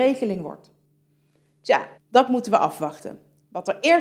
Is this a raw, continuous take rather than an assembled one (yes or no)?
no